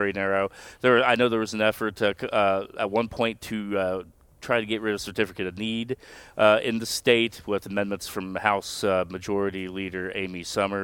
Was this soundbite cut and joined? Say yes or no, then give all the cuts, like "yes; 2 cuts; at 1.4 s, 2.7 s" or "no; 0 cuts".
no; 0 cuts